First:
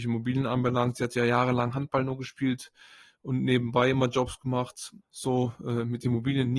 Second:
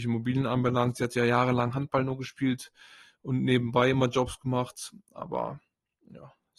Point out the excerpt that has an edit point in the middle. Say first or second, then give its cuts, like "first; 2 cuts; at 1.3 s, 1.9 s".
first; 1 cut; at 5.0 s